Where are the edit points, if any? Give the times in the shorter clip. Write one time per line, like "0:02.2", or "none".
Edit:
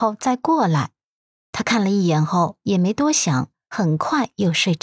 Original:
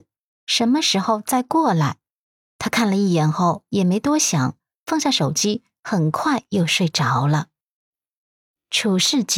0:03.7